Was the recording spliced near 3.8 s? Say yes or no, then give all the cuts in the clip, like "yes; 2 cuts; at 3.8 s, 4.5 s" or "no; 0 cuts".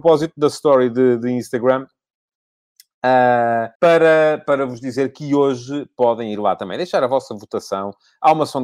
yes; 1 cut; at 3.8 s